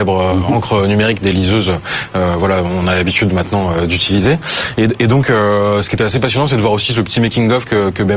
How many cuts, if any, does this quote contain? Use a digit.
0